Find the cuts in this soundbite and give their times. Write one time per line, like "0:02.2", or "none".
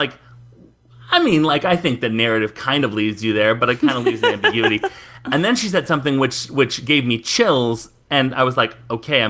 none